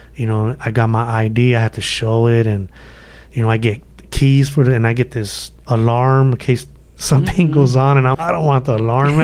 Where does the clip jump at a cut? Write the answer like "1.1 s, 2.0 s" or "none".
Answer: 8.1 s

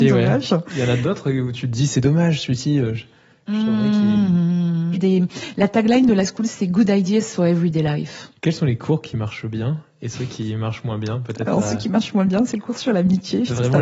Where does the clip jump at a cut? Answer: 4.9 s, 8.4 s

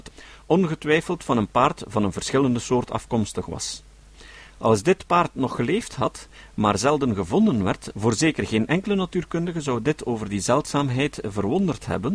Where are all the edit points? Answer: none

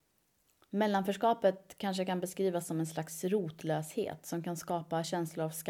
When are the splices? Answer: none

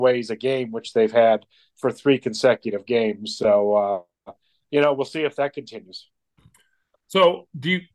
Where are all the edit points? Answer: none

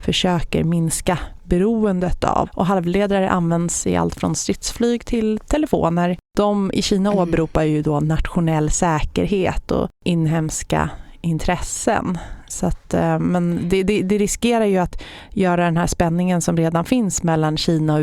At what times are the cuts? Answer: 2.5 s

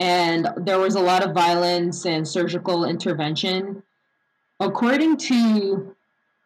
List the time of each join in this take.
4.4 s

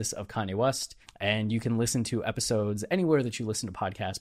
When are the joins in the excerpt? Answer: 1.0 s

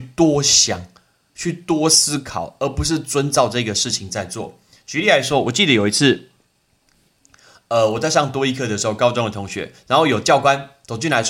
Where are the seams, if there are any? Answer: none

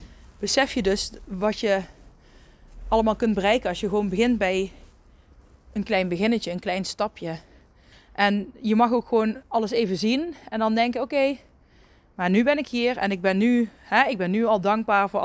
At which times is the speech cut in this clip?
7.9 s

